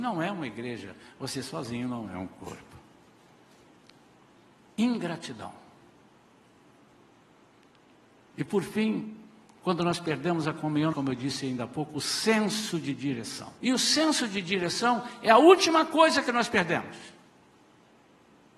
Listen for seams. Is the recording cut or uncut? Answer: cut